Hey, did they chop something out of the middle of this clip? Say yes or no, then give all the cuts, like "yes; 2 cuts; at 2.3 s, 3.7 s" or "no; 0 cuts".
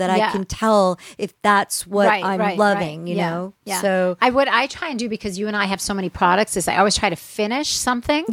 no; 0 cuts